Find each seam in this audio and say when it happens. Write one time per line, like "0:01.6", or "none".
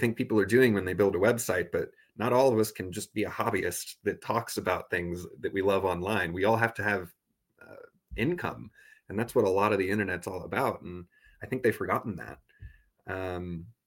none